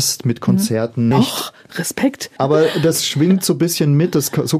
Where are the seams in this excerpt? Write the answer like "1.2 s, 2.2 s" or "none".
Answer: 1.1 s, 2.4 s